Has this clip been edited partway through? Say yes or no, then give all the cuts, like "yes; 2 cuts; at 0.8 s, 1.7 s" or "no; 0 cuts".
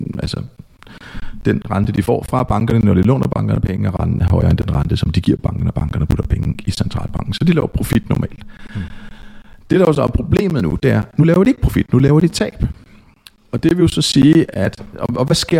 no; 0 cuts